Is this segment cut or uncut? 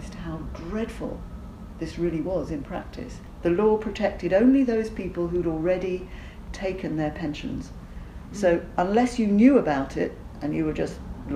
uncut